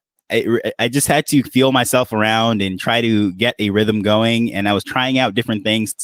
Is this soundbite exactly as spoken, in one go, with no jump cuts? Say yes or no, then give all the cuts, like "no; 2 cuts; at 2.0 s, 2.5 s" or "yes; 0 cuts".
yes; 0 cuts